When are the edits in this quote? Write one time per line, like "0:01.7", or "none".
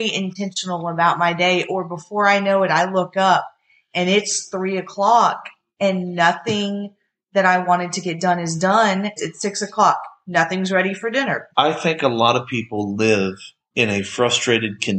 0:09.2
0:11.5
0:13.7